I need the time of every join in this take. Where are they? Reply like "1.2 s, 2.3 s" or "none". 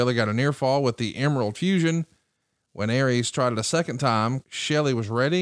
2.6 s, 4.4 s

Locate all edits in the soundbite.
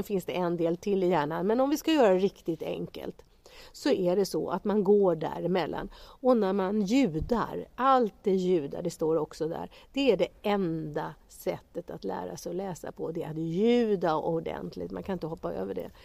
none

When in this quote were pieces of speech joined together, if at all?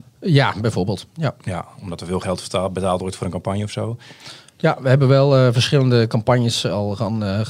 none

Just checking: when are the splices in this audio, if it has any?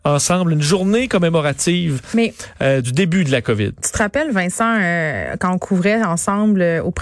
2.8 s

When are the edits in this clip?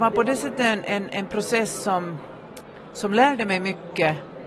none

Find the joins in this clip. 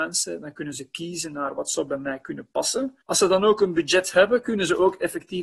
3.0 s

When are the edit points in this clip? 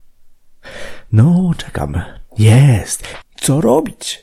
3.2 s

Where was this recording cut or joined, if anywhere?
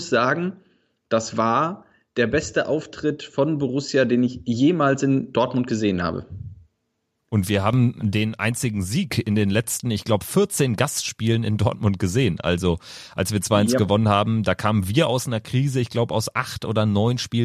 none

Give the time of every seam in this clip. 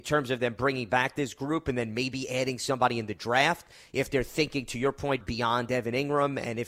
5.2 s

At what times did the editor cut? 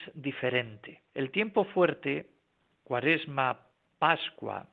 1.1 s

